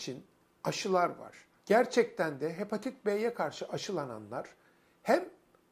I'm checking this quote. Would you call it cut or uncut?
cut